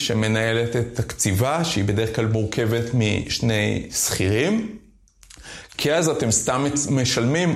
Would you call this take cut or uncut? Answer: cut